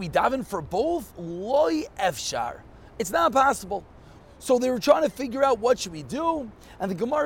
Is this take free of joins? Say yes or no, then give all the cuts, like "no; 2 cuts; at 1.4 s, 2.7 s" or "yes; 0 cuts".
no; 1 cut; at 4.2 s